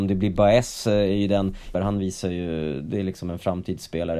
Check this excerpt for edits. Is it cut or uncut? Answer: cut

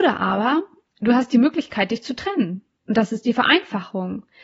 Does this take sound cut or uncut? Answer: uncut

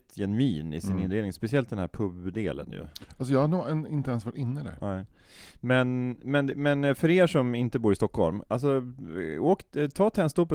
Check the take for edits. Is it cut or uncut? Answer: uncut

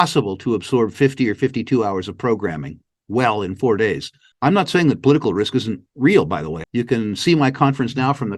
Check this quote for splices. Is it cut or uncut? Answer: cut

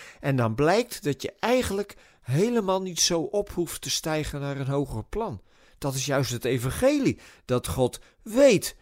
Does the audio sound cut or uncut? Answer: uncut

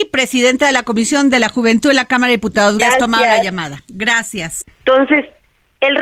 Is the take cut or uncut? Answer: cut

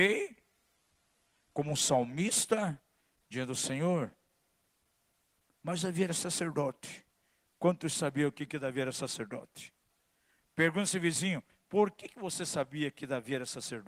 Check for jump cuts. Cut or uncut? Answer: uncut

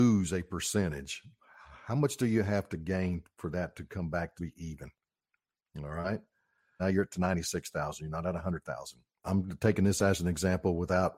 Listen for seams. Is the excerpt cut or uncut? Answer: cut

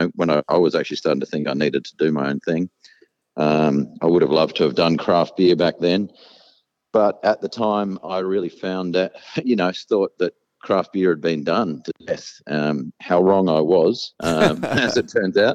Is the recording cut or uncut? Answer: uncut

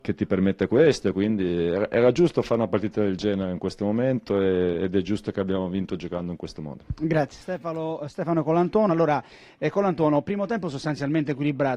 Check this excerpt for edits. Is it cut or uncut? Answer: uncut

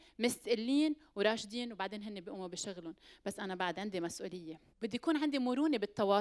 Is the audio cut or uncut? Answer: cut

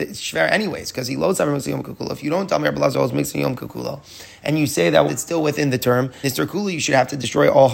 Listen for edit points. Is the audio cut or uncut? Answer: cut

